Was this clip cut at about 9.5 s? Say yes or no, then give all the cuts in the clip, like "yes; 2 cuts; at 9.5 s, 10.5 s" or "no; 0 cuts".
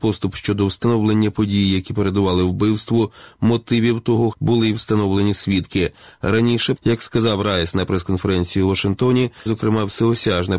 yes; 3 cuts; at 4.3 s, 6.8 s, 9.5 s